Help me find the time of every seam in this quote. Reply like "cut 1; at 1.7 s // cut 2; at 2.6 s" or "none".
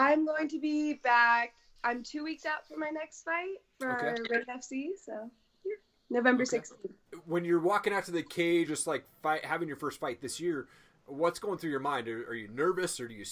cut 1; at 8.7 s